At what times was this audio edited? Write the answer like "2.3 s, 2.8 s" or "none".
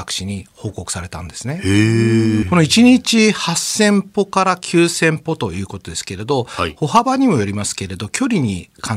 2.4 s